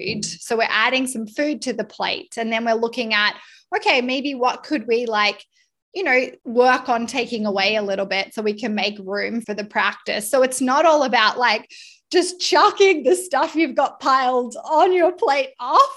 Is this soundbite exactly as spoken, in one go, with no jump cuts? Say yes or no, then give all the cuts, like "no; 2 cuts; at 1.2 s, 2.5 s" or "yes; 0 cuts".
no; 2 cuts; at 6.4 s, 9.4 s